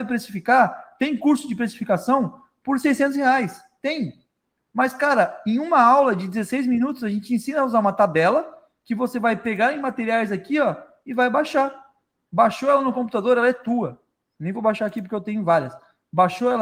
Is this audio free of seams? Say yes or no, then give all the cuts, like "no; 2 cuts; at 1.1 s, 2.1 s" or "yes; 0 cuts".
yes; 0 cuts